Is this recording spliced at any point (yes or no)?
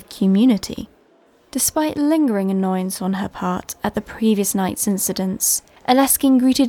no